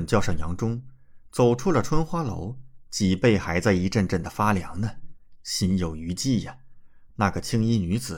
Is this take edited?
yes; 1 cut; at 7.1 s

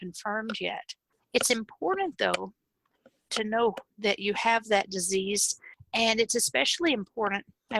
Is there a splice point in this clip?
yes; 1 cut; at 1.2 s

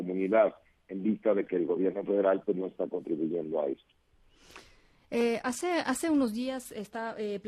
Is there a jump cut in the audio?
no; 0 cuts

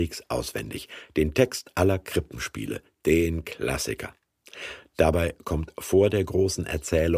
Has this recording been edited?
no; 0 cuts

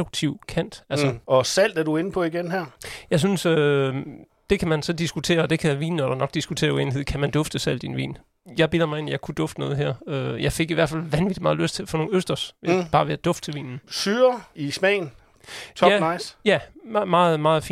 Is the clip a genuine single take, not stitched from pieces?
yes; 0 cuts

